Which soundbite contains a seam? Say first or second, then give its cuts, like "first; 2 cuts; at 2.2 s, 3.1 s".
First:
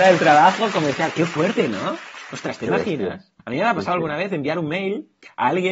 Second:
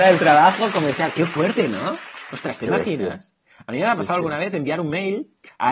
first; 1 cut; at 3.4 s